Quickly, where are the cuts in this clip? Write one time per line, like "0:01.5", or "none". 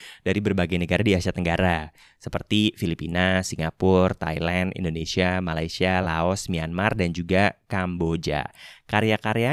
none